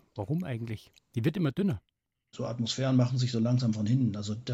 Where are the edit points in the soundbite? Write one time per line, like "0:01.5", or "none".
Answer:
0:02.3